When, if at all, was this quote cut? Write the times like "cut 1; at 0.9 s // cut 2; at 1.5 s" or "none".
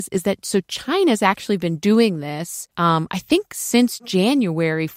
cut 1; at 2.7 s